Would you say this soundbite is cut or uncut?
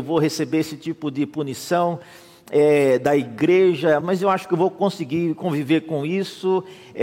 cut